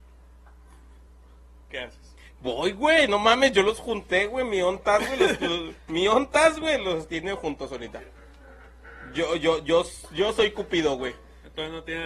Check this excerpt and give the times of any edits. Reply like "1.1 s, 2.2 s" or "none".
none